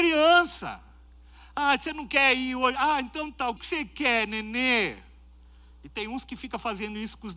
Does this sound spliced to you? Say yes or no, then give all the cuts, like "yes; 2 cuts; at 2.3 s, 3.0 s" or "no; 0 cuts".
yes; 1 cut; at 3.6 s